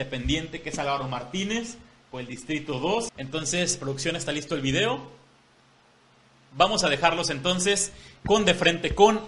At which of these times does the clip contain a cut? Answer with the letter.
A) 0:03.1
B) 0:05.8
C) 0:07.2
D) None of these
A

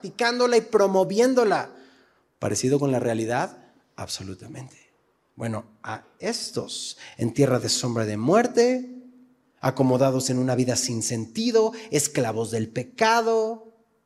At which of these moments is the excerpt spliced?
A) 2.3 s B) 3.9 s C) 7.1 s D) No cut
D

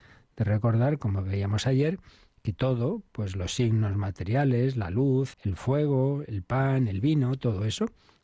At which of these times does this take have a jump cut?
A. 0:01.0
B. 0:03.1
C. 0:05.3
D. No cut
C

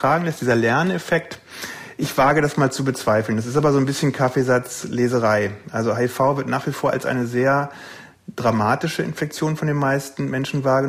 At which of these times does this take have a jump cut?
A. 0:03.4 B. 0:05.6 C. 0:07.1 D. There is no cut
D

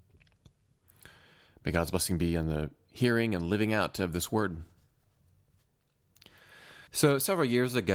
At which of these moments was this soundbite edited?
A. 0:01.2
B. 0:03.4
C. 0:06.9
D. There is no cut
C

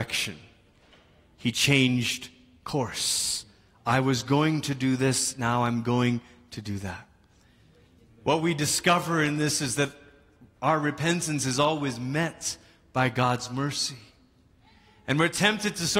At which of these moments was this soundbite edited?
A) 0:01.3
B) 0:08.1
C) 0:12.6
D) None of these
D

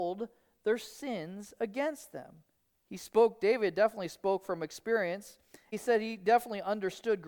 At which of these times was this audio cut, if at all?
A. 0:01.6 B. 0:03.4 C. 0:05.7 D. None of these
C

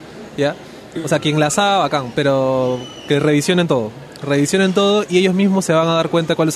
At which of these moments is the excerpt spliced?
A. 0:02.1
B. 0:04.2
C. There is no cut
A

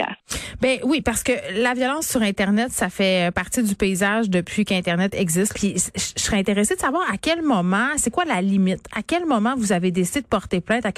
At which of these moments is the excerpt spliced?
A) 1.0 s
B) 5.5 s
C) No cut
B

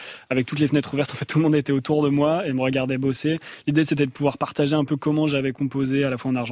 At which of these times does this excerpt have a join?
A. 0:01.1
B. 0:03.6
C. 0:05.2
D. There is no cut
D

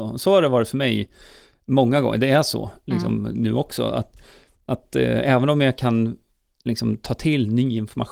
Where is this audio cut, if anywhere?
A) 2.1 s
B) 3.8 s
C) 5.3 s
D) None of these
D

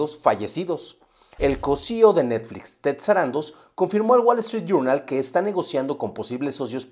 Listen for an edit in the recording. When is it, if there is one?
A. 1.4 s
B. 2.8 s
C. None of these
A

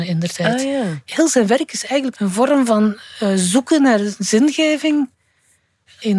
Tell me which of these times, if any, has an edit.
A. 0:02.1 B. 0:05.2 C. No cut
A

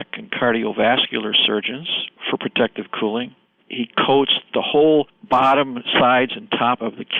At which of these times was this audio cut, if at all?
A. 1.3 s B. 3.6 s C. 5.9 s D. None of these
B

